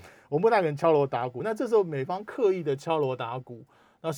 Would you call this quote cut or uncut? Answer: uncut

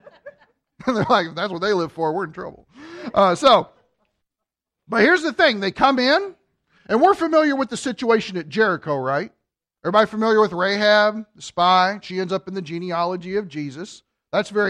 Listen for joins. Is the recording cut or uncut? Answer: uncut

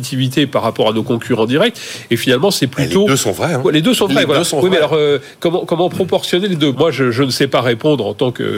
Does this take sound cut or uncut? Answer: cut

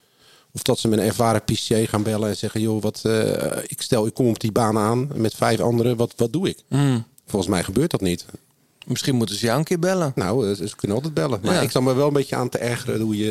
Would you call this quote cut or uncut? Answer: uncut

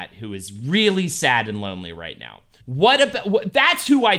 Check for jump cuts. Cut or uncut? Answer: cut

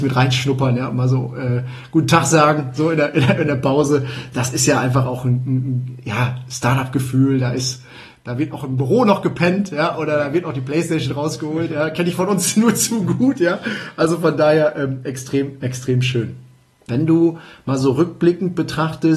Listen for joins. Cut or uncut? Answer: cut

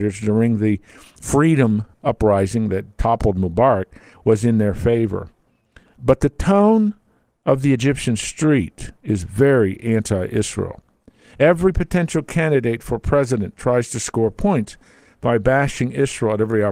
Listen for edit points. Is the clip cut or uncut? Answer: uncut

